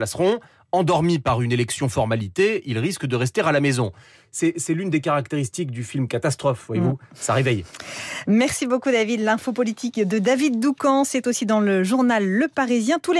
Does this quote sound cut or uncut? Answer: uncut